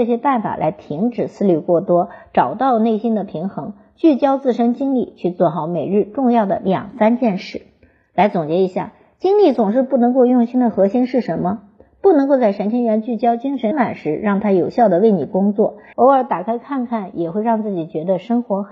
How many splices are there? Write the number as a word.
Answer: two